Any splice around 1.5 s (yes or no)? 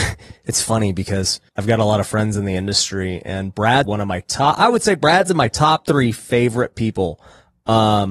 yes